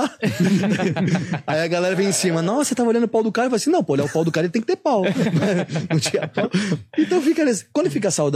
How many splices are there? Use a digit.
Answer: 0